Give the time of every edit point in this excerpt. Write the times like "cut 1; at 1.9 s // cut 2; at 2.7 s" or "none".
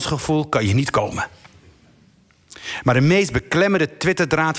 none